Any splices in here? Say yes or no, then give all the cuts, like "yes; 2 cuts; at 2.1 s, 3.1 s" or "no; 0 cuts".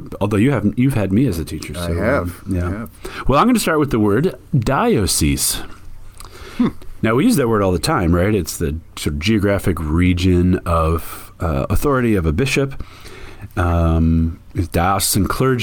no; 0 cuts